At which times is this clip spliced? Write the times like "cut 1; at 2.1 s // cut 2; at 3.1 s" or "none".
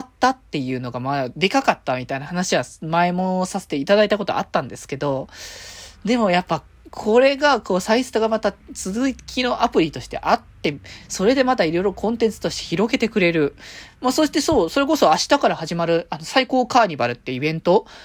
none

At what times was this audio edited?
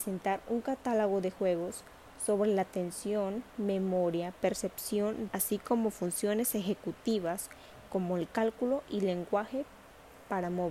cut 1; at 5.3 s

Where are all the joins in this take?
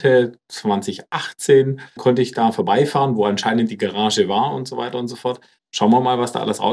cut 1; at 2.0 s // cut 2; at 5.6 s

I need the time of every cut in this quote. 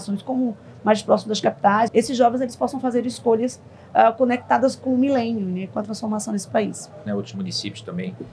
cut 1; at 1.9 s // cut 2; at 7.1 s

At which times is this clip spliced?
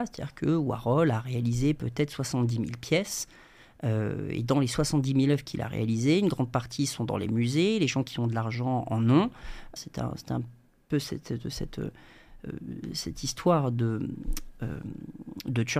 cut 1; at 9.8 s

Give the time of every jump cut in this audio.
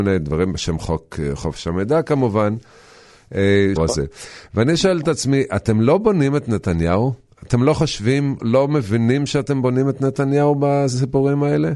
cut 1; at 3.8 s // cut 2; at 8.4 s

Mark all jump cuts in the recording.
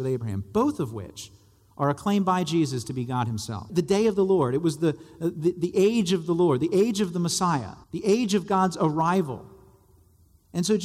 cut 1; at 3.7 s // cut 2; at 7.8 s

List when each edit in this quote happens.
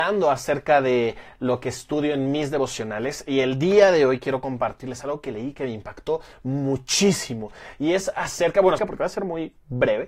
cut 1; at 8.8 s

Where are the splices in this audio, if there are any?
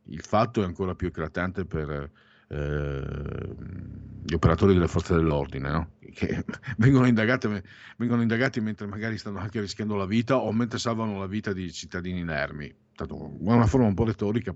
none

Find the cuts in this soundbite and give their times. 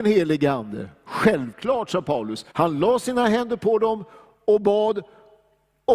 cut 1; at 2.5 s

